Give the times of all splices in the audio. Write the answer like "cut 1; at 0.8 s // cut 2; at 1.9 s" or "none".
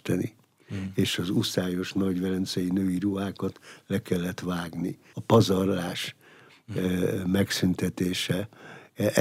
cut 1; at 5.1 s